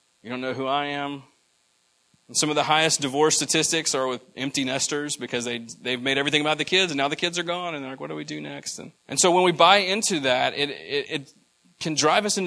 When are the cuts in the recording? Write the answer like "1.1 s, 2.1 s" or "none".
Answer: 2.1 s, 9.0 s, 11.1 s

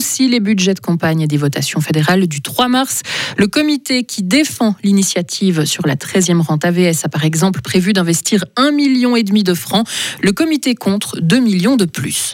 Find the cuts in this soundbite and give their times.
none

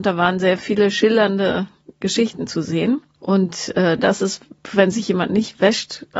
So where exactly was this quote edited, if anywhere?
4.0 s

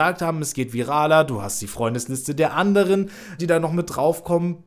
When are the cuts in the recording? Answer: 3.4 s

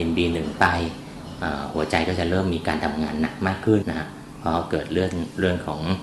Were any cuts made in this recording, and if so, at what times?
3.8 s

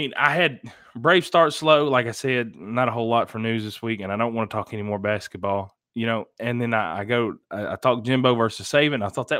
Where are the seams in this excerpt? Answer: none

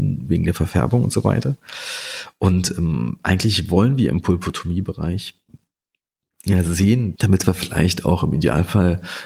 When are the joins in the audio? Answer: 7.1 s

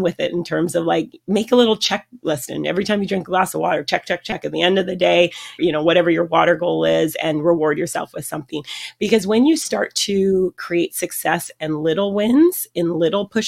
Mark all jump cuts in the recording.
5.6 s

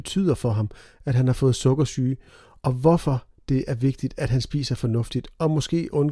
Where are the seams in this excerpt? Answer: none

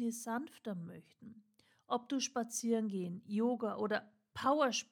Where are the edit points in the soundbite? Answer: none

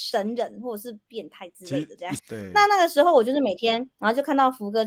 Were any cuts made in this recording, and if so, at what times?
2.2 s

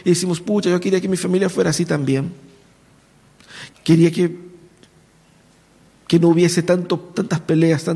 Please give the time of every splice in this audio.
3.7 s

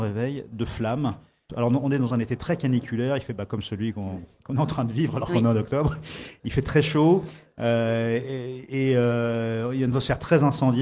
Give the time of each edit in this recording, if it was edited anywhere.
1.5 s

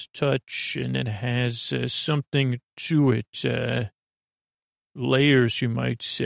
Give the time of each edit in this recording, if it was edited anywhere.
none

